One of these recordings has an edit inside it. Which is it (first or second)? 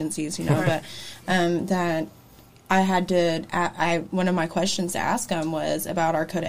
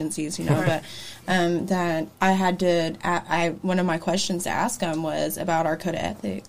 second